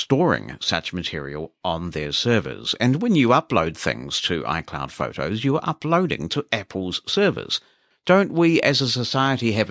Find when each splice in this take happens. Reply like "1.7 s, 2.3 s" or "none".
7.9 s